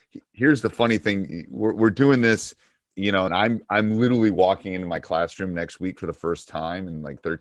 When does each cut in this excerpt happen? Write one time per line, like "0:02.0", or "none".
0:03.3